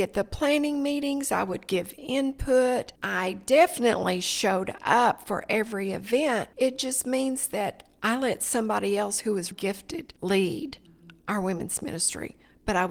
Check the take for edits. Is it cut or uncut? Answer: cut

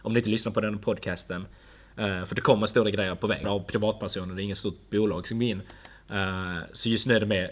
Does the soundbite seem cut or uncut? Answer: cut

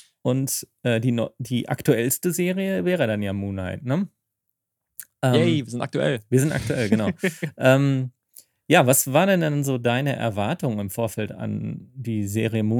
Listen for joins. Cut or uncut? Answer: uncut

